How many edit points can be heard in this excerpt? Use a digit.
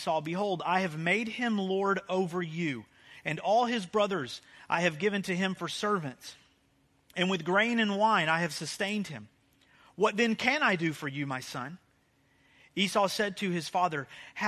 0